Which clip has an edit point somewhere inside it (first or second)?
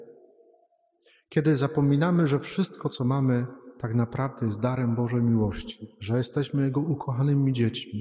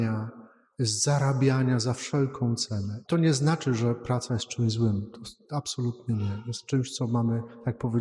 second